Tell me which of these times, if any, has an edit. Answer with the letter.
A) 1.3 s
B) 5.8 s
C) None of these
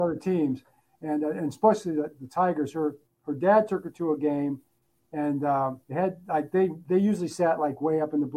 B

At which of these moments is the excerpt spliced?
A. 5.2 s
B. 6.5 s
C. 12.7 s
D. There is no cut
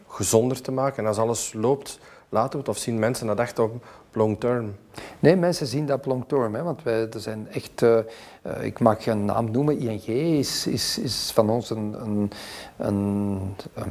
D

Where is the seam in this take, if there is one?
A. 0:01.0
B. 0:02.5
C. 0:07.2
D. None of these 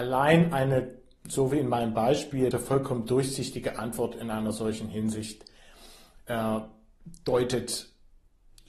B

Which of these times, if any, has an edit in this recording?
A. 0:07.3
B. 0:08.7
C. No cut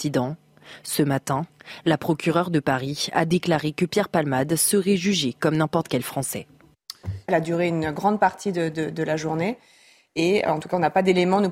A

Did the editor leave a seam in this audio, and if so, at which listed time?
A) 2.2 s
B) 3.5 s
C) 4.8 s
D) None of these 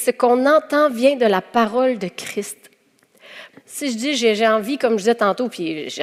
B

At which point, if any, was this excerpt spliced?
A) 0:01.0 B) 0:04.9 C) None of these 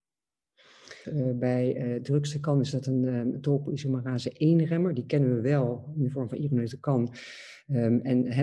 A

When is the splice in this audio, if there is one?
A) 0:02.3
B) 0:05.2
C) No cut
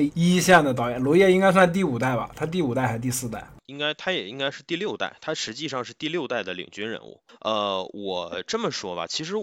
C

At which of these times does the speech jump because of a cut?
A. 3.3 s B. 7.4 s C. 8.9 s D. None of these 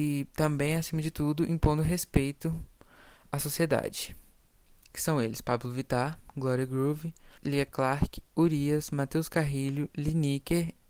B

